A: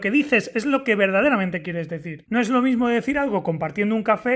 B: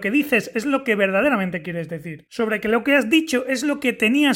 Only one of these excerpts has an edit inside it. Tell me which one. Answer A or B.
A